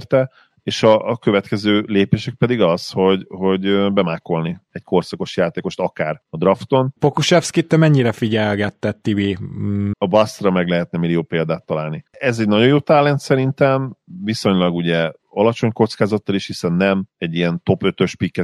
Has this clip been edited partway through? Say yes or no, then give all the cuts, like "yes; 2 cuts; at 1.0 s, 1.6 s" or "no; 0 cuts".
yes; 3 cuts; at 7.0 s, 9.9 s, 12.1 s